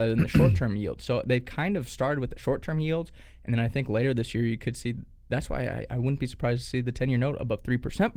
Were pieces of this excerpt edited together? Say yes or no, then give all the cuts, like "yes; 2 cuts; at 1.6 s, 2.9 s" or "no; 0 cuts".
no; 0 cuts